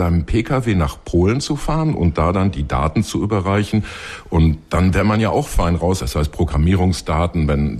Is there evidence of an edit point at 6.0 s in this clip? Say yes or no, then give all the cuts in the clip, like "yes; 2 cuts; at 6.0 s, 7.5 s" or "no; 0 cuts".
yes; 1 cut; at 6.0 s